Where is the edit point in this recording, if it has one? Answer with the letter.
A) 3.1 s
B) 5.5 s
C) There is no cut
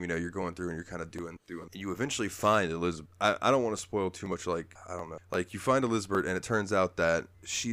C